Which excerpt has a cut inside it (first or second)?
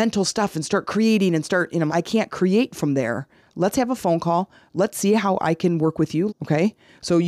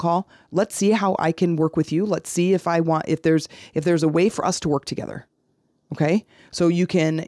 first